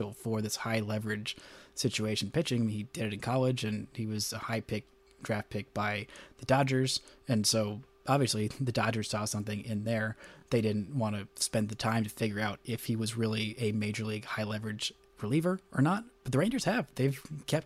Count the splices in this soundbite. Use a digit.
0